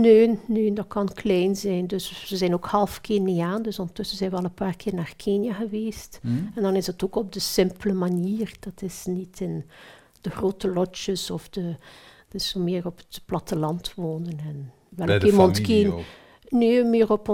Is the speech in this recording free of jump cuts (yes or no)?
yes